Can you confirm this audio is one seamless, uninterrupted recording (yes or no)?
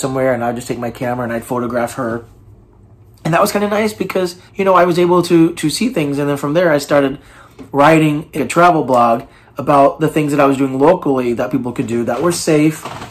no